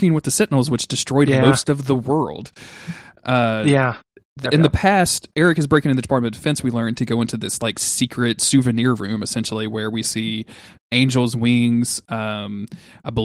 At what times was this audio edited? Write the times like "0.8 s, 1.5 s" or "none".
5.3 s